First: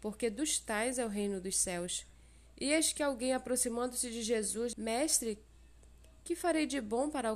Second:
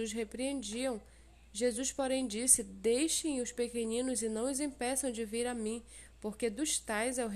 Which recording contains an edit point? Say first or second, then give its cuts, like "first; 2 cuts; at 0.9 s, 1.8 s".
first; 2 cuts; at 2.5 s, 4.7 s